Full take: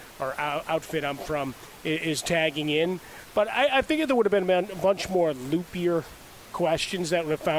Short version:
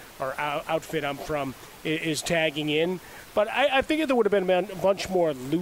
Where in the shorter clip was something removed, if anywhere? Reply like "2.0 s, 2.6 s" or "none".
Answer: none